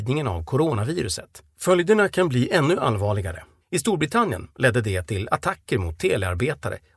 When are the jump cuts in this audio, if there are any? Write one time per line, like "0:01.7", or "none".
0:01.5
0:03.6